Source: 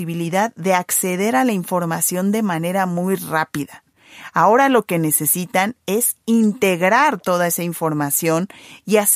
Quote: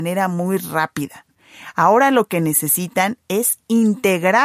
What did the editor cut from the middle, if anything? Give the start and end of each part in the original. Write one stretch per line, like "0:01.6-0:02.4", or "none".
none

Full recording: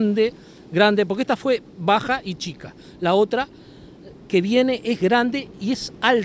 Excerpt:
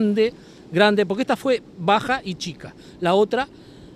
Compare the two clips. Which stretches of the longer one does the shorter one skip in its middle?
none

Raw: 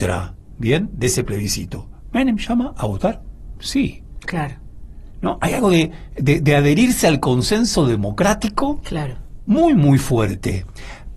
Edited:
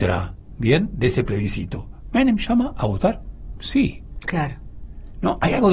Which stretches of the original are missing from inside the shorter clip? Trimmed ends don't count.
none

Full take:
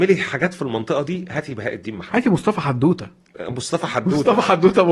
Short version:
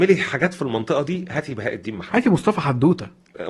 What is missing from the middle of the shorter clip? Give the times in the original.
none

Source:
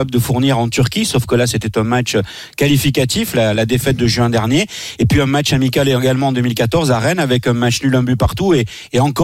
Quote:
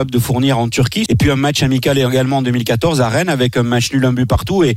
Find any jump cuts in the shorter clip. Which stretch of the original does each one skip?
0:01.1-0:05.0

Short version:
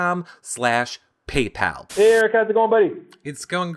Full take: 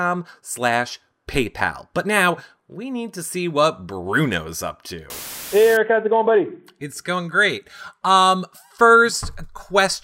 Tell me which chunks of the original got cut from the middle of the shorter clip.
0:01.9-0:05.5

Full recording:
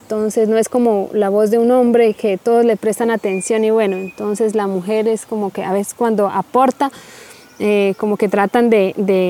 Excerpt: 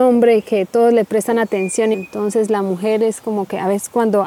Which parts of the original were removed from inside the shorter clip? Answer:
0:03.7-0:04.0

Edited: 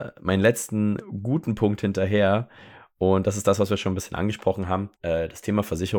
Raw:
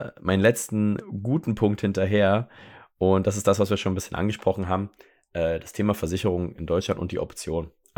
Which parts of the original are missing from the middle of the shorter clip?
0:04.9-0:05.3

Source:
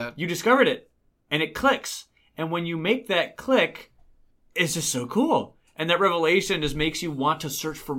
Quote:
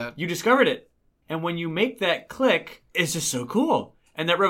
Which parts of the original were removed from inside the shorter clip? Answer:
0:01.2-0:02.3
0:04.0-0:04.5

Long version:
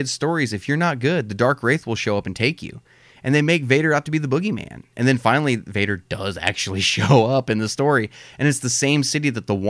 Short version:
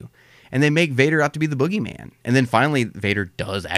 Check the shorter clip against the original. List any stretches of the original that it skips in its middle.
none

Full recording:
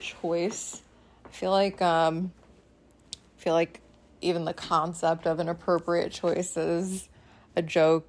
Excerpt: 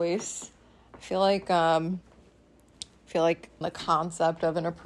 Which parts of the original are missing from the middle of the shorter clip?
0:03.9-0:04.4

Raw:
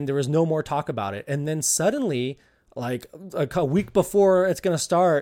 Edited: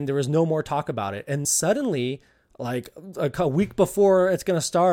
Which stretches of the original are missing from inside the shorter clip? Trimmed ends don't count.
0:01.4-0:01.6

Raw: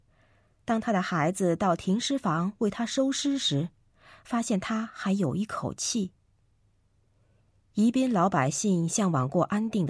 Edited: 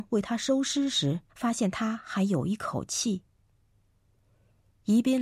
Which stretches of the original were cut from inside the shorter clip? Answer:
0:03.8-0:04.2

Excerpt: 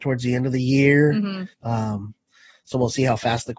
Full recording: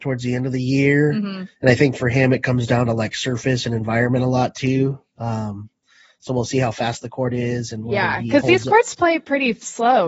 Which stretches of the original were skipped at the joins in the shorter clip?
0:01.5-0:05.1

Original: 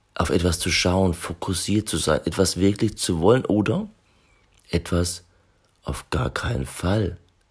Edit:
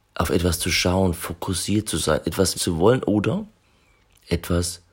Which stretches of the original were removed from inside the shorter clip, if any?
0:02.5-0:03.0

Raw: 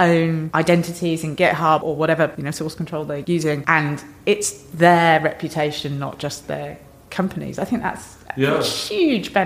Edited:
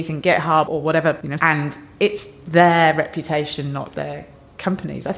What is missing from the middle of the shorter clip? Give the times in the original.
0:02.5-0:03.6
0:06.2-0:06.4

